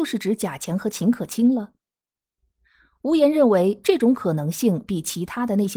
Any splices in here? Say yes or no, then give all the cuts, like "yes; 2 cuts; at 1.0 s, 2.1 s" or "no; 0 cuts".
no; 0 cuts